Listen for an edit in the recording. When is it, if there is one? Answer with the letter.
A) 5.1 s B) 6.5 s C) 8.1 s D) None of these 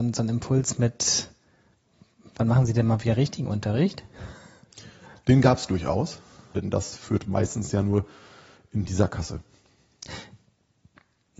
B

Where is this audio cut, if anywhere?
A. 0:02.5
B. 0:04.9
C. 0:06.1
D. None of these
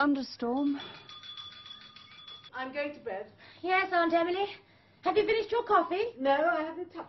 A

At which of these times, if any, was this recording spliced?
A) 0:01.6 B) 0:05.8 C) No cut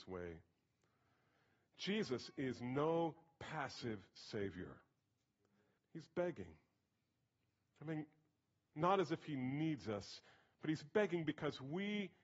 B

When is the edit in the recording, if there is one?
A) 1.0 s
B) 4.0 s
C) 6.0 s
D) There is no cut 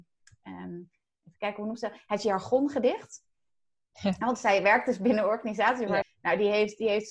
C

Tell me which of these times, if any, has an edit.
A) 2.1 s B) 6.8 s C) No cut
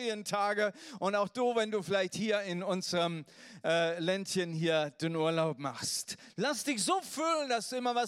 C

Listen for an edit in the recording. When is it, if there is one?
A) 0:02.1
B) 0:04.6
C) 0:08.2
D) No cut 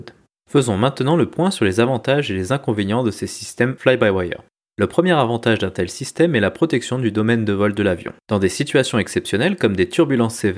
C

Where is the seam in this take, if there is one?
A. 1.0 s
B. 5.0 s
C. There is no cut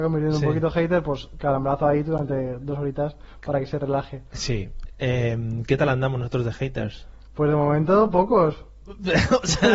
C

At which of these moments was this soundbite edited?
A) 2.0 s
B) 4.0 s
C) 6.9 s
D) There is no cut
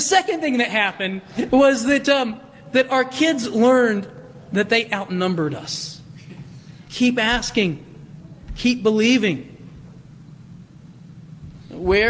C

